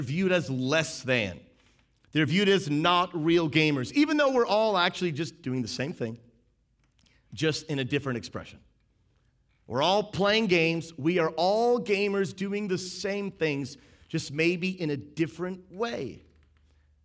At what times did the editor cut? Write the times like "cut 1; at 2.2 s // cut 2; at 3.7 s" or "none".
none